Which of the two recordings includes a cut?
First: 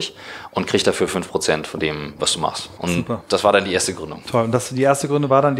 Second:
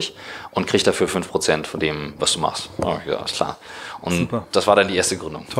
first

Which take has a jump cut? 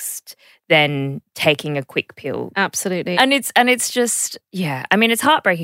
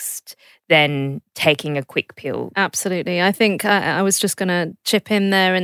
first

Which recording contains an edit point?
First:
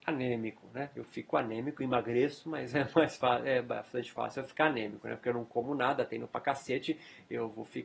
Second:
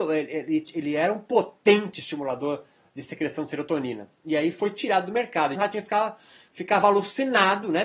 second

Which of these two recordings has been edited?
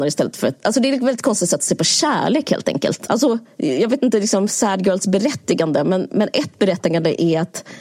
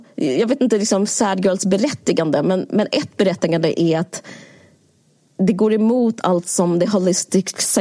first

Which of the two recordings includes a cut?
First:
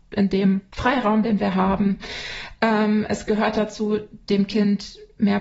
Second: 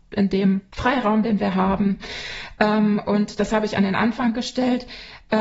first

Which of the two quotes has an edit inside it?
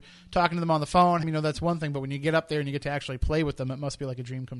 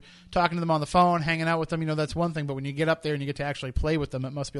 first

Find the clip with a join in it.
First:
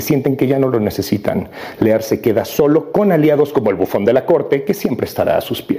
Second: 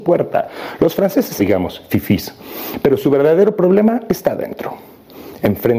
second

